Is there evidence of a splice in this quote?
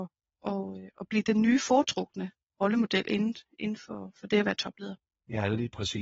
no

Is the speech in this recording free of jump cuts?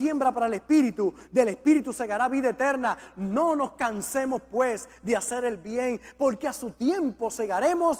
yes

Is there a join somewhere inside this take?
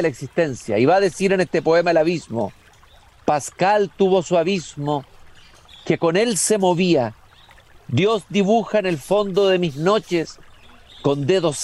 yes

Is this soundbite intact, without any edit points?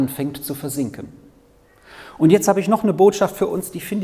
yes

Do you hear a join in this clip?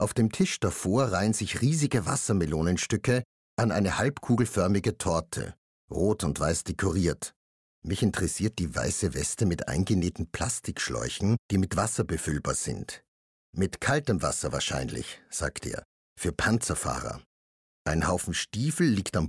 yes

